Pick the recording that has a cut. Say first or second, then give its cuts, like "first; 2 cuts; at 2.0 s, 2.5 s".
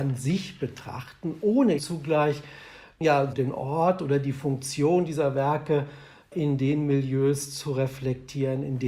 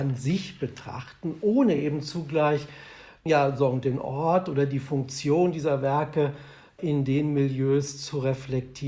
first; 2 cuts; at 1.8 s, 3.3 s